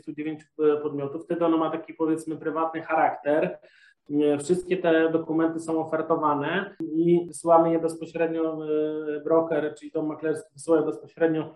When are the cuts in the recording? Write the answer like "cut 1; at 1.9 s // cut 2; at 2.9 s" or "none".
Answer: none